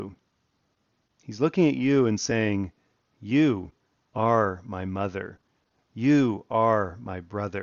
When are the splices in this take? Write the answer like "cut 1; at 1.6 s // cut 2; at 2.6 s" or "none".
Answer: none